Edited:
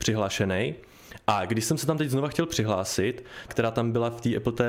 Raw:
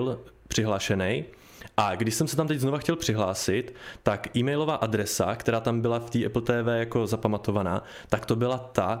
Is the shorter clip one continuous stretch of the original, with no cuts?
no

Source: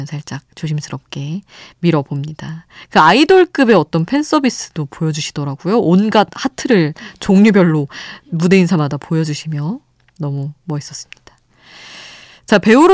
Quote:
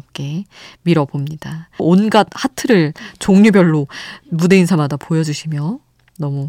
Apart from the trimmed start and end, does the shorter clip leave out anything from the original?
yes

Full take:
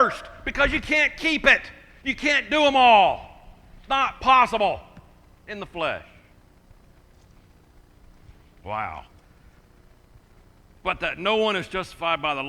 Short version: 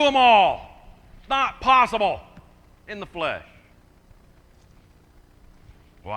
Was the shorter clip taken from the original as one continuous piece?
yes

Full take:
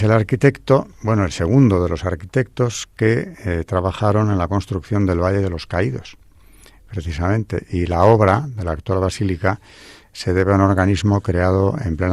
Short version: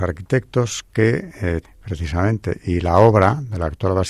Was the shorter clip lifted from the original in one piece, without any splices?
no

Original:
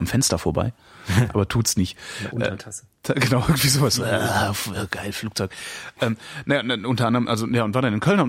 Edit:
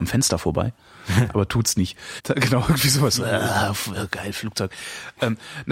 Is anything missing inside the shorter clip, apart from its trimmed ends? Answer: yes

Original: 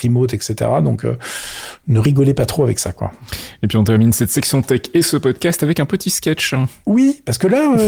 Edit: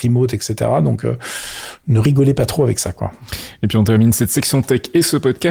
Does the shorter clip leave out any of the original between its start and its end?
no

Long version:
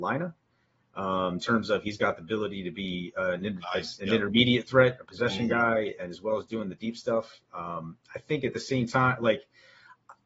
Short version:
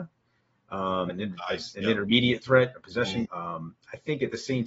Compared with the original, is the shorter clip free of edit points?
no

